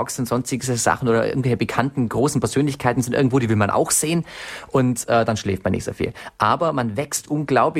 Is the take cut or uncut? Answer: uncut